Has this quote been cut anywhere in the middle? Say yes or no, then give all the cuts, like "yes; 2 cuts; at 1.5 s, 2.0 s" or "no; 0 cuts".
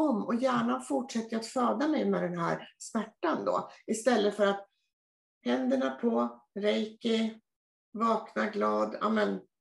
no; 0 cuts